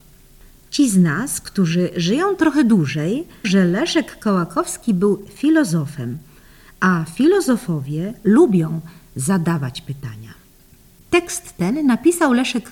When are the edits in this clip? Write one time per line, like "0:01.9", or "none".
0:03.4